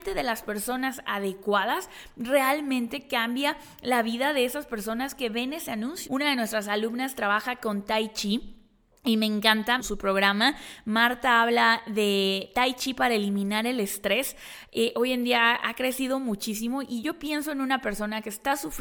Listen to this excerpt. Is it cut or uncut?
cut